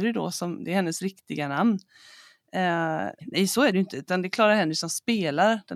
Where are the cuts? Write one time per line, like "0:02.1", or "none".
0:03.2